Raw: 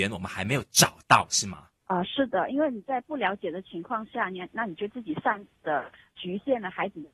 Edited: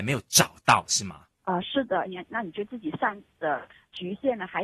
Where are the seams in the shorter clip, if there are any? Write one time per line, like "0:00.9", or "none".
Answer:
0:02.1